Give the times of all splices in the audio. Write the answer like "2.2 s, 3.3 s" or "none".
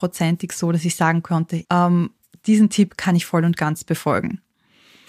1.6 s